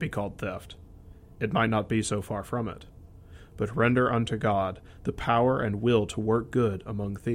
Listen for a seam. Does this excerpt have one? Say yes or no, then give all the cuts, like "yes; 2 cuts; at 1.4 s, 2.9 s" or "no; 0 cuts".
no; 0 cuts